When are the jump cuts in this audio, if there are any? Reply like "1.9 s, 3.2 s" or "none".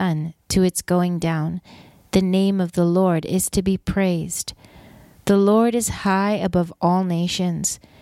none